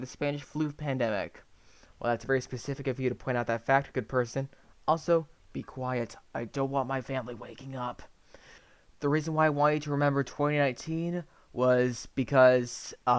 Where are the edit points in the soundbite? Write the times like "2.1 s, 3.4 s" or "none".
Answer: none